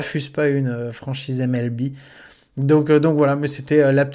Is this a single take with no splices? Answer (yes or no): yes